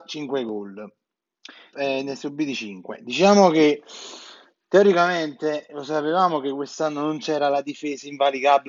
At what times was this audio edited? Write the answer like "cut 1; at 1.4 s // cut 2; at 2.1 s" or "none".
cut 1; at 1.7 s